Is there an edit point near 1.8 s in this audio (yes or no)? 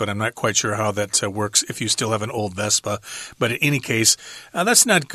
no